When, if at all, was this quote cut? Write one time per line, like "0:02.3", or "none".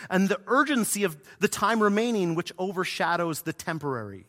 none